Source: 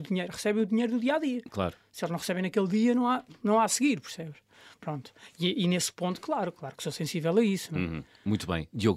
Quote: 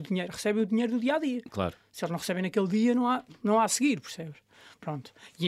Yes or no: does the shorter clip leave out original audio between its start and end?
no